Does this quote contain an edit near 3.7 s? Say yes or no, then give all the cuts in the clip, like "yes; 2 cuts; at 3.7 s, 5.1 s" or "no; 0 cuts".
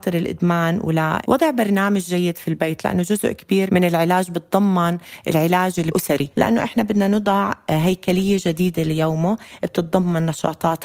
yes; 1 cut; at 3.7 s